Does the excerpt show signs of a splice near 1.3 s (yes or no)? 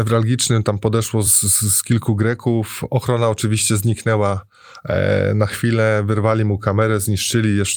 no